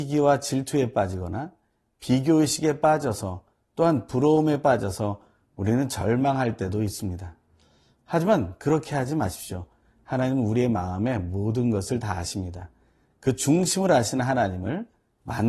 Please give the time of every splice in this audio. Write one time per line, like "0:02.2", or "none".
none